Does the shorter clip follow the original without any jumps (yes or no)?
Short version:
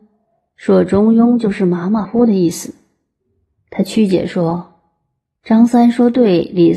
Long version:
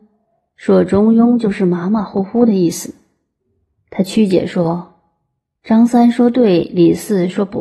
no